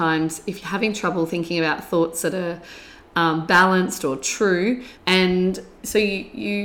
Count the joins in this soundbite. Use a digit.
1